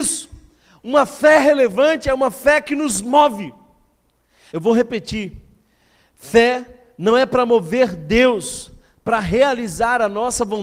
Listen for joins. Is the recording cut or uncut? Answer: cut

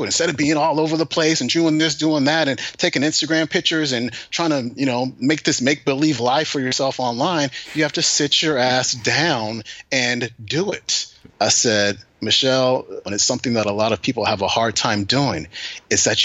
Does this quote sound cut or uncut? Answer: cut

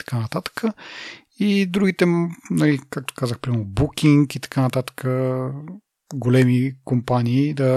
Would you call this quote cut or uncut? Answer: uncut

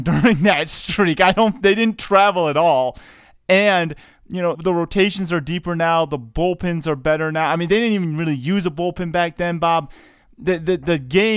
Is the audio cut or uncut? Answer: cut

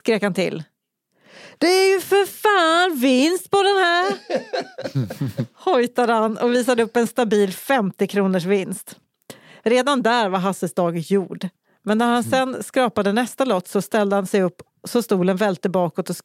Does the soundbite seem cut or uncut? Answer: uncut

